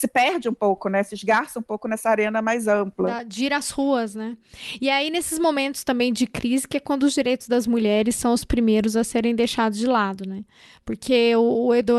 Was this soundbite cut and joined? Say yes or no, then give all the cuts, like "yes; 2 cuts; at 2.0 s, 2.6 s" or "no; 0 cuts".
no; 0 cuts